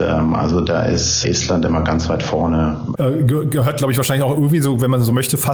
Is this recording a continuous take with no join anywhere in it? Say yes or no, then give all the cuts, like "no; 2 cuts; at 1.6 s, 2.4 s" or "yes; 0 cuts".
no; 2 cuts; at 1.2 s, 2.9 s